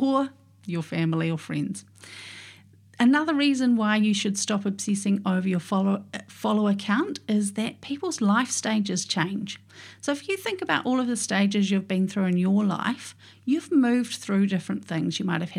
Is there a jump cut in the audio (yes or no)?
no